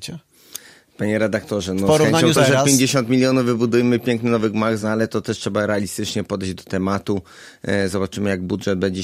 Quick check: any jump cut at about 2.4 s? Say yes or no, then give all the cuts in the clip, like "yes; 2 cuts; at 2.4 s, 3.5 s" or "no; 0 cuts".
yes; 2 cuts; at 2.4 s, 4.8 s